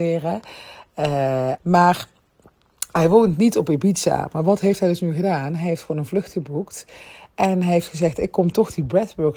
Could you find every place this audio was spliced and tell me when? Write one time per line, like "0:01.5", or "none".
0:01.6